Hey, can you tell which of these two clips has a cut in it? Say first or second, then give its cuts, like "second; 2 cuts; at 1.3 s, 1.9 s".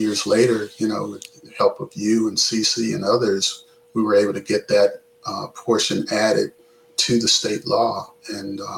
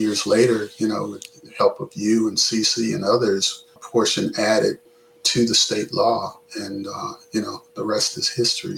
second; 1 cut; at 3.8 s